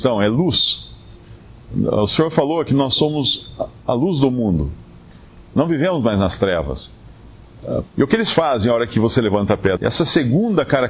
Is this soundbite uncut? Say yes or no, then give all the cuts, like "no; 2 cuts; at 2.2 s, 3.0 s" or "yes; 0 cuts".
no; 3 cuts; at 5.4 s, 7.9 s, 9.8 s